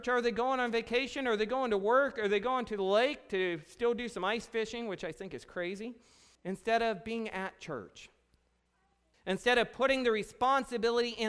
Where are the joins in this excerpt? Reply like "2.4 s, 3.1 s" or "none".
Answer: 6.4 s, 9.1 s